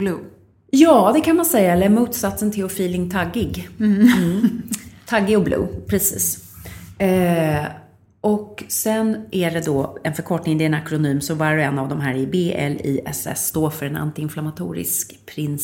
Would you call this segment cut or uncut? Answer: uncut